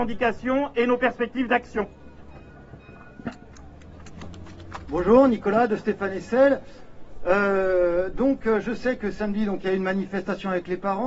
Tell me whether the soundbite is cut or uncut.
uncut